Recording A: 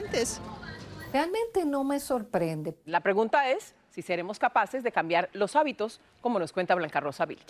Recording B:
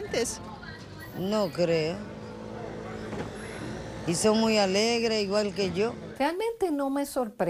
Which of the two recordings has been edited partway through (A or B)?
A